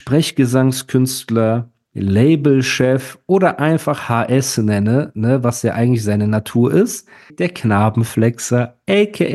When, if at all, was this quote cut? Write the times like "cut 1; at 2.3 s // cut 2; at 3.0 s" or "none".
cut 1; at 7.3 s